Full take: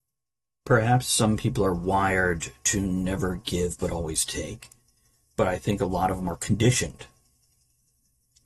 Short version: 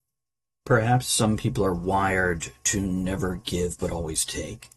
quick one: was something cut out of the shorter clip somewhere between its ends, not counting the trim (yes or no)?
no